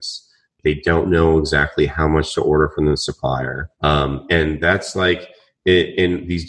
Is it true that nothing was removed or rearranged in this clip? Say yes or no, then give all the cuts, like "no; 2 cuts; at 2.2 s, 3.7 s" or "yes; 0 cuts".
no; 1 cut; at 3.7 s